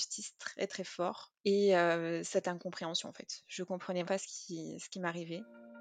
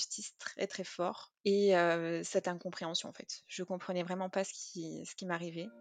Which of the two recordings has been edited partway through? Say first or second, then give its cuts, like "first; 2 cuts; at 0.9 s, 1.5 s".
first; 1 cut; at 4.0 s